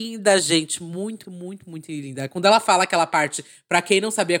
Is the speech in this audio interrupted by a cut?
yes; 1 cut; at 1.2 s

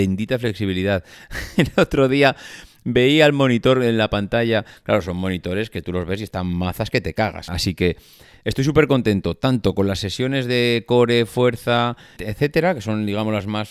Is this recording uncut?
no; 2 cuts; at 7.5 s, 12.2 s

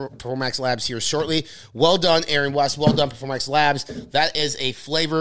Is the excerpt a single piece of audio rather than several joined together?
yes; 0 cuts

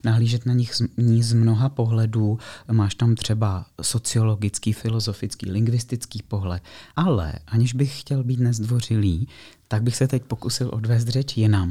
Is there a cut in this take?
no; 0 cuts

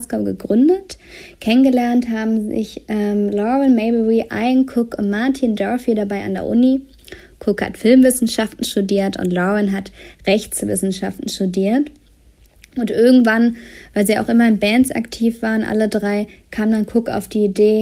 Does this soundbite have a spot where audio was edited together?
no; 0 cuts

